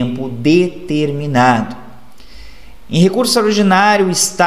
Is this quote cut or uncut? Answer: cut